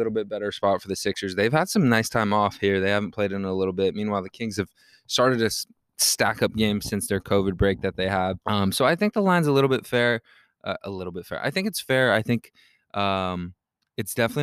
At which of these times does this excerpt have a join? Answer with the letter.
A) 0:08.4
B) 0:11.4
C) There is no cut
A